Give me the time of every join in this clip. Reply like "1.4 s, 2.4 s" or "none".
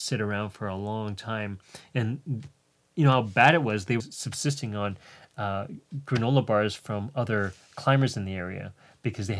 4.0 s